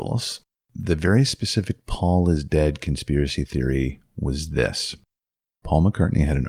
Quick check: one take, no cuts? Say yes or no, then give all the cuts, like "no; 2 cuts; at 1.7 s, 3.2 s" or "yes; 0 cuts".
yes; 0 cuts